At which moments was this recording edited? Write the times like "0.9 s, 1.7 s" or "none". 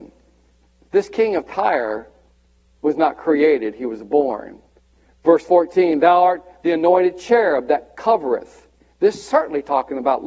none